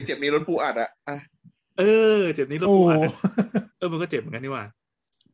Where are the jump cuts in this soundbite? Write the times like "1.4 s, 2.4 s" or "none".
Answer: 3.7 s